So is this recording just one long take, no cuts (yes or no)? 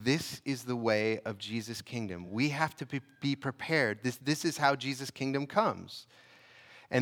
yes